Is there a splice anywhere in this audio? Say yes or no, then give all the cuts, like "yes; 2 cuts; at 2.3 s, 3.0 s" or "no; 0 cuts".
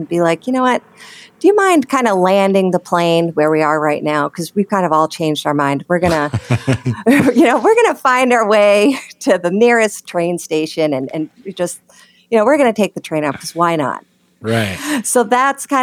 yes; 1 cut; at 14.4 s